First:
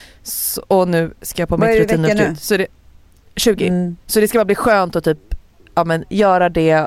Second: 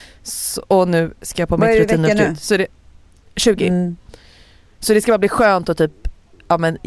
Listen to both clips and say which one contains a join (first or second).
first